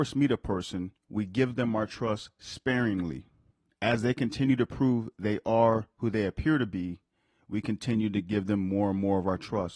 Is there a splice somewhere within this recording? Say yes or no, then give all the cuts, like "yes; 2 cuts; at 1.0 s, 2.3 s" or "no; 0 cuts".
yes; 1 cut; at 1.0 s